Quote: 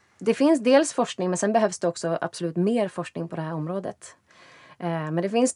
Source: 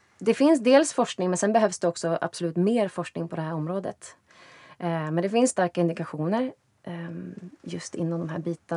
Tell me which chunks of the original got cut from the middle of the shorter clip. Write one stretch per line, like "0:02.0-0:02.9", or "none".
none